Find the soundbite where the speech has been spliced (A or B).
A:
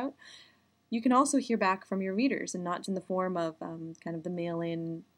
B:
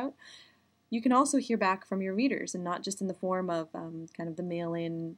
A